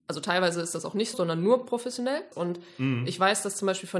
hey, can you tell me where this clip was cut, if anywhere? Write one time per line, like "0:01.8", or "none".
0:01.1
0:02.3